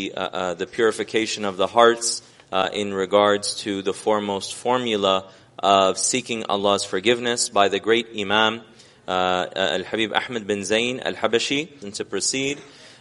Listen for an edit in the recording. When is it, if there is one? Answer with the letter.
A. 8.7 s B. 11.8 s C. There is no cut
B